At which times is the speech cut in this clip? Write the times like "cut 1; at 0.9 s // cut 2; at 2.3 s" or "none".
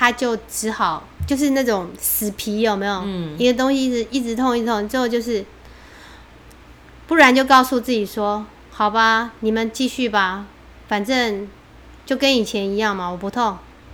none